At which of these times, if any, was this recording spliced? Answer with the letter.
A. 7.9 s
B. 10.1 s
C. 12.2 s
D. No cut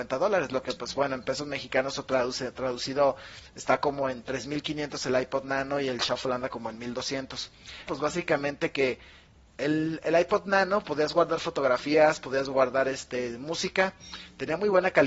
A